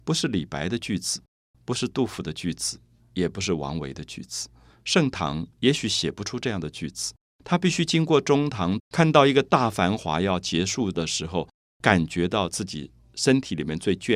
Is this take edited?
yes; 2 cuts; at 8.8 s, 11.6 s

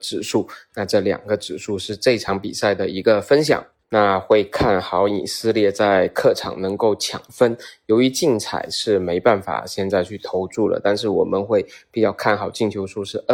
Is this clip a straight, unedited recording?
no; 1 cut; at 3.8 s

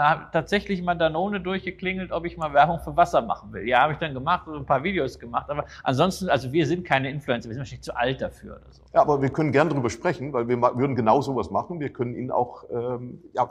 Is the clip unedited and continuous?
no; 1 cut; at 8.9 s

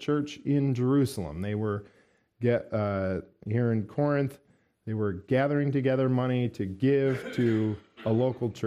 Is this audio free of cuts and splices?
yes; 0 cuts

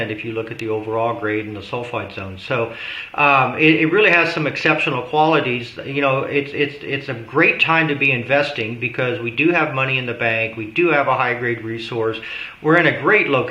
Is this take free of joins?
yes; 0 cuts

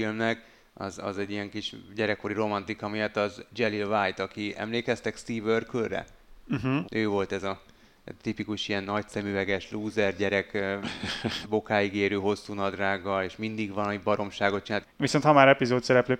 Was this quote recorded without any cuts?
no; 2 cuts; at 6.8 s, 14.8 s

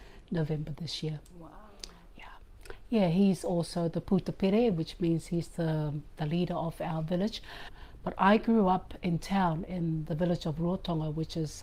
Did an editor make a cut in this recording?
no; 0 cuts

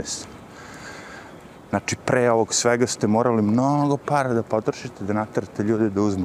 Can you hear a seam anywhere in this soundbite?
yes; 1 cut; at 1.7 s

